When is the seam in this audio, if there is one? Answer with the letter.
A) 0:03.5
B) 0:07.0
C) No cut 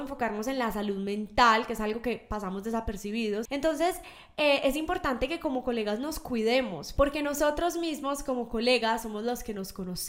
A